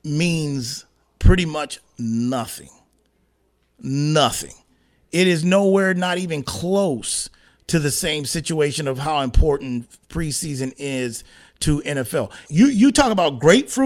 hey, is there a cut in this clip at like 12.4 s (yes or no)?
yes